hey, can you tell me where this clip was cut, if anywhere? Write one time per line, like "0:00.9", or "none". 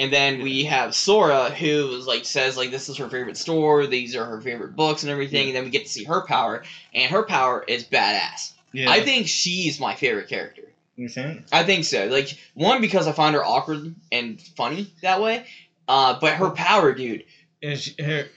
none